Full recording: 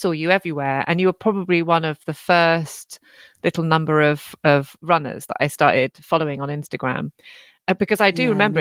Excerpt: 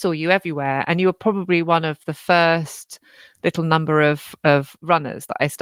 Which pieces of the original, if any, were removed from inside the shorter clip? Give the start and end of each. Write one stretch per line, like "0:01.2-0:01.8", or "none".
none